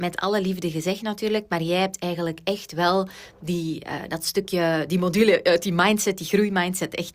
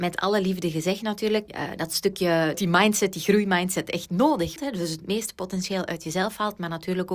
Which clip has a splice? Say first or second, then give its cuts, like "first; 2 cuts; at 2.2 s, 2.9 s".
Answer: second; 3 cuts; at 1.5 s, 2.5 s, 4.6 s